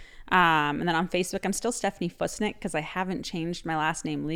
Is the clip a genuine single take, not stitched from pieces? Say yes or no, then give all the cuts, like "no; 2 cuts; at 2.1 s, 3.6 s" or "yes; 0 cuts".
yes; 0 cuts